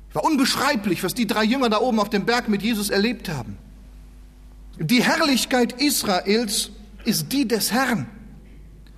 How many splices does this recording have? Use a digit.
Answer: 2